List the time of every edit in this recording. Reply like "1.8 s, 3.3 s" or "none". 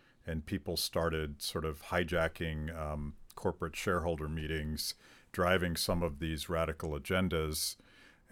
none